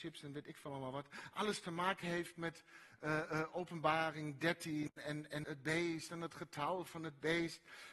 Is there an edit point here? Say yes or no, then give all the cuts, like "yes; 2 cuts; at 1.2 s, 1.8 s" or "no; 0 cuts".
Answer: yes; 1 cut; at 5.4 s